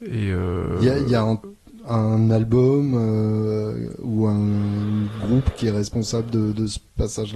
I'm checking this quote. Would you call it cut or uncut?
uncut